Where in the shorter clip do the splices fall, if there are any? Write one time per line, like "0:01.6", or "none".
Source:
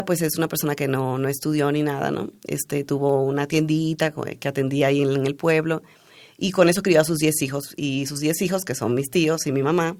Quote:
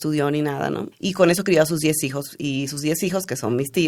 0:00.9